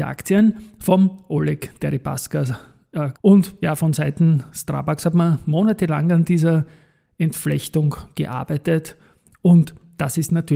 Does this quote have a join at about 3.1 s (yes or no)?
yes